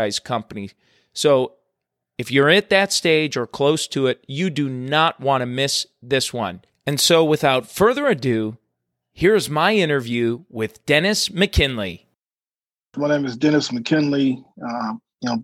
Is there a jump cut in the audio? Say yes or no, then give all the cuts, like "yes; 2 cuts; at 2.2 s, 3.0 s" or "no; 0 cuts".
no; 0 cuts